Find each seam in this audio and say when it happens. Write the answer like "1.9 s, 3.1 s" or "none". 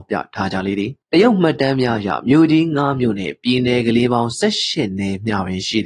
1.0 s